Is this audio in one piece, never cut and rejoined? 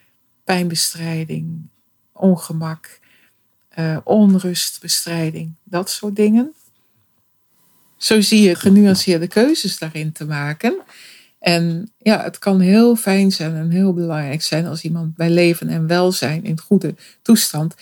no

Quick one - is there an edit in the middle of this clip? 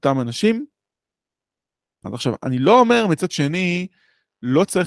yes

